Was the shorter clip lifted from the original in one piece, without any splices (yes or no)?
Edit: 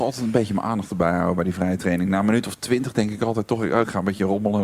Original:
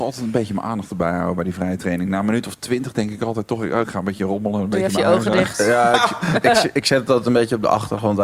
yes